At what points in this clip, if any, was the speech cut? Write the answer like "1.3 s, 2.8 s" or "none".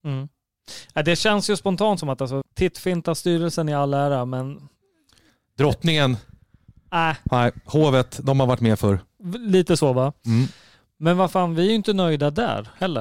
2.4 s